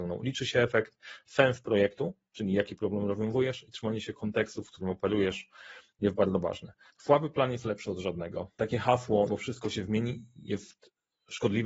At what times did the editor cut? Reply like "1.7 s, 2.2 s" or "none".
6.9 s, 9.3 s